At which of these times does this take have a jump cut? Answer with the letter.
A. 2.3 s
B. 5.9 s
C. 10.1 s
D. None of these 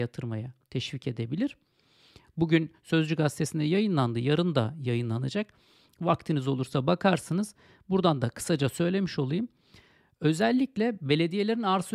A